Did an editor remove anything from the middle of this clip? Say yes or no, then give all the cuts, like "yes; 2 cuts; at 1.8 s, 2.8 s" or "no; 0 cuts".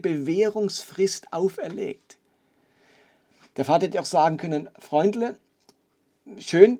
no; 0 cuts